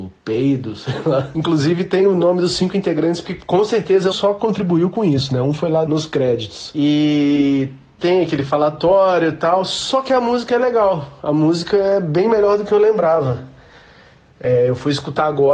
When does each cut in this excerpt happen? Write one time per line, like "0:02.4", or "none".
0:04.1
0:05.9